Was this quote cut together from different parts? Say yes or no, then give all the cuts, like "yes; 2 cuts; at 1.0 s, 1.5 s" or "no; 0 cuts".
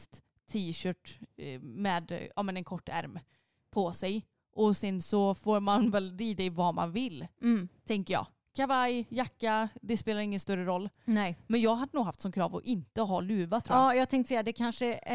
no; 0 cuts